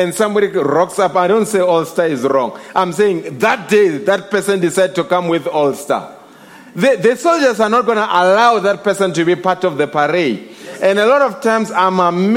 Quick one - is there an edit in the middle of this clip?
no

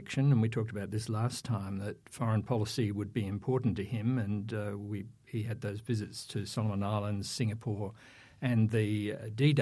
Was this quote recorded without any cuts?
yes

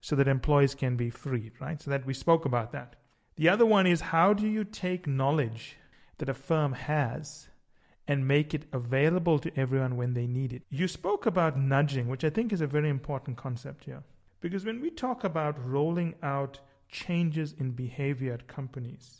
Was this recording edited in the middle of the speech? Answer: yes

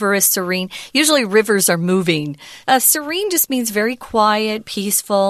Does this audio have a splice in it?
yes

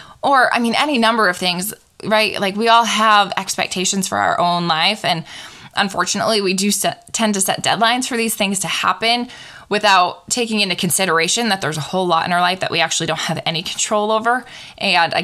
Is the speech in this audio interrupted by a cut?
no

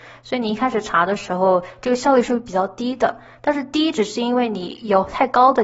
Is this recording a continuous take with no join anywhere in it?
yes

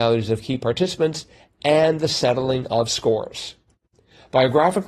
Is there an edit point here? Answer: no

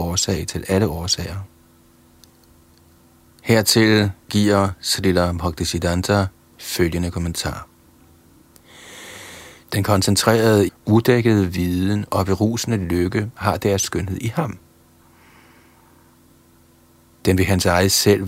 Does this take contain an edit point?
yes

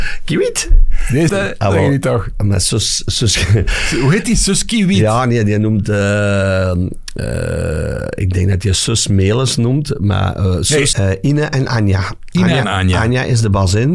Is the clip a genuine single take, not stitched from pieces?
no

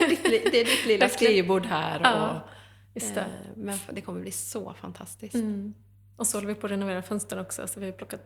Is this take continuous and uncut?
yes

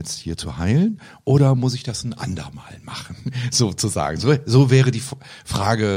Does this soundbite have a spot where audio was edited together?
no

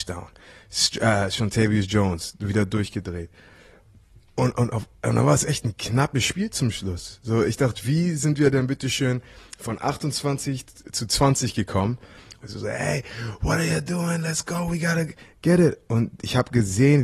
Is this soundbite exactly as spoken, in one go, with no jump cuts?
no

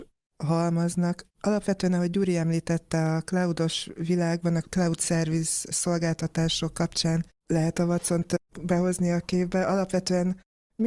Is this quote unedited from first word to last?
no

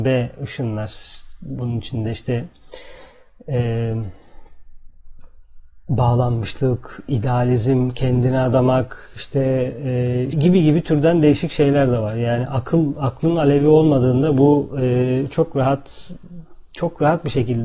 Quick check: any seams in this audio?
yes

